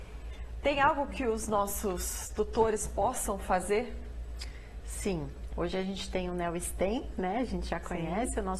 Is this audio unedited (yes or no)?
no